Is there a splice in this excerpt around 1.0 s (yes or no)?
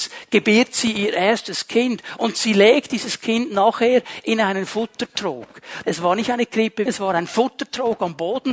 no